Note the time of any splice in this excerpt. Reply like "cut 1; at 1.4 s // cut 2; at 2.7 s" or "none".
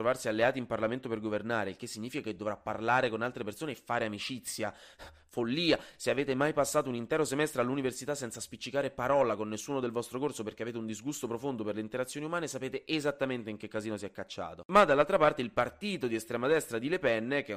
none